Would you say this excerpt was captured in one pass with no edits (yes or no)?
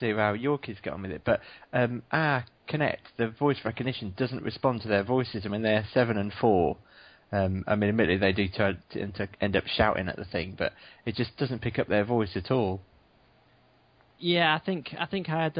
yes